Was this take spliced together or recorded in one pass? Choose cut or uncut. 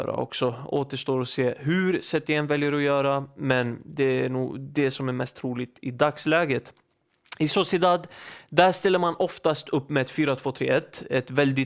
uncut